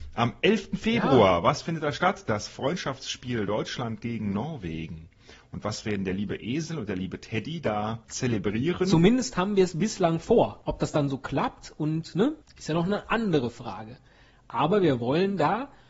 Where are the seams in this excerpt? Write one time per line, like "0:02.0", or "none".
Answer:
none